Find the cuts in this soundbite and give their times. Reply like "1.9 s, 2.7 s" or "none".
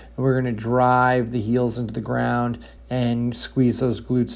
2.8 s